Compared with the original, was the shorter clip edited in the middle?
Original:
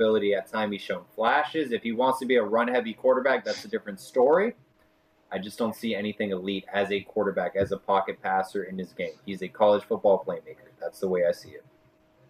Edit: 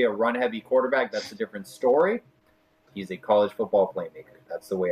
yes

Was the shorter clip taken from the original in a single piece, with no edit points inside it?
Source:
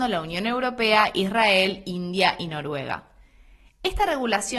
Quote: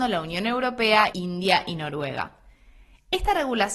no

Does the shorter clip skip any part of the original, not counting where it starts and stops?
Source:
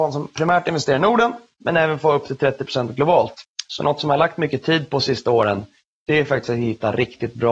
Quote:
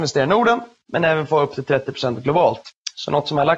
no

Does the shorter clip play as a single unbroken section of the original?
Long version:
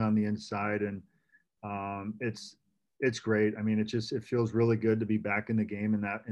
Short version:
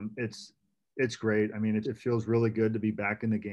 no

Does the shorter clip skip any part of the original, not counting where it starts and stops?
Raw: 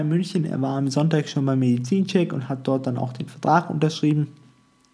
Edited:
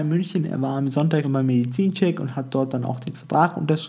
yes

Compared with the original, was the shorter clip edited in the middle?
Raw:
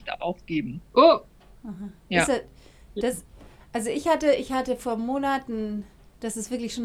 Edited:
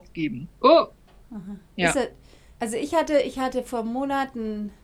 yes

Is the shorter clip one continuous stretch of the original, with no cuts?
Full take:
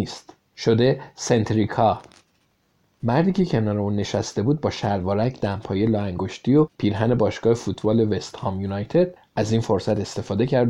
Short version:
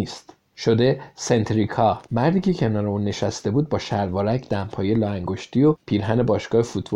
no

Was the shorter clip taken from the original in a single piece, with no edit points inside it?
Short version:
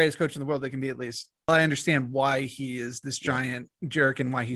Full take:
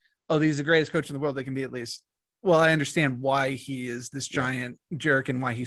no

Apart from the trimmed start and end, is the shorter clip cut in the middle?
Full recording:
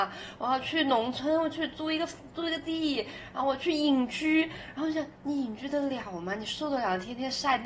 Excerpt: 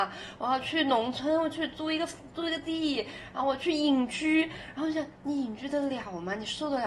no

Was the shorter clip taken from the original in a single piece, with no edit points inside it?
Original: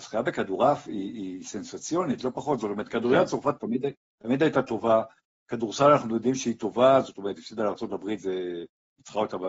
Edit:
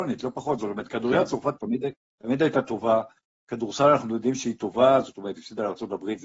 yes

